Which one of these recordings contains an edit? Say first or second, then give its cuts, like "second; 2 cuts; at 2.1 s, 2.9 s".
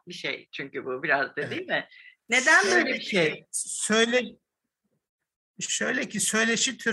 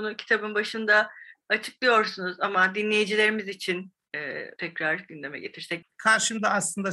second; 2 cuts; at 4.6 s, 5.8 s